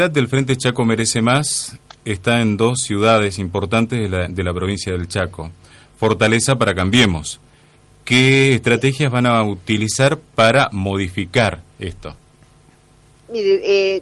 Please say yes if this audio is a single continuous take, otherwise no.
yes